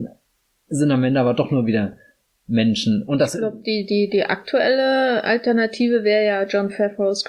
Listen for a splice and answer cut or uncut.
uncut